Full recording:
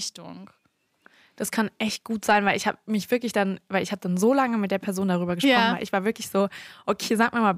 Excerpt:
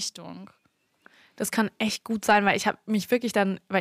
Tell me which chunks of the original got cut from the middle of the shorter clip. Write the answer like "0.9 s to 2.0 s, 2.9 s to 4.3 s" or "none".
none